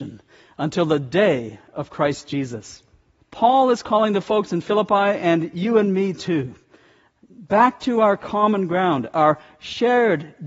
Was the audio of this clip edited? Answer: yes; 1 cut; at 3.2 s

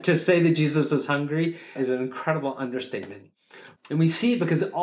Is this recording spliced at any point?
yes; 2 cuts; at 1.8 s, 3.8 s

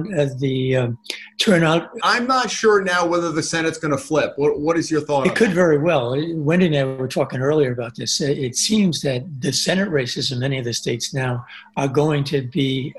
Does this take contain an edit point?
yes; 1 cut; at 2.0 s

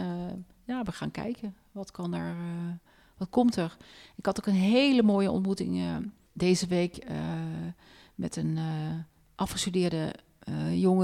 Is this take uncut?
yes; 0 cuts

